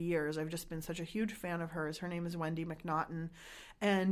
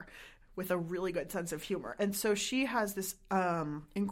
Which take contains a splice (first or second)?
second